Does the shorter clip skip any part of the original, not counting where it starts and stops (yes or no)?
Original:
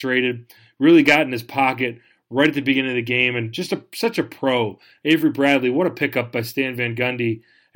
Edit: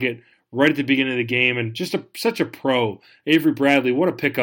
no